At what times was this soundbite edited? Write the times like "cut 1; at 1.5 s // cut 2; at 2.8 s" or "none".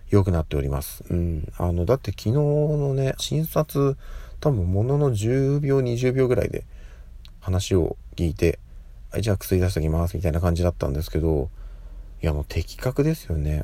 cut 1; at 1.0 s // cut 2; at 3.2 s // cut 3; at 7.4 s